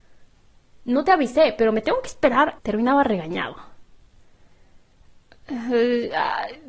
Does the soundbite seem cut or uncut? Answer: cut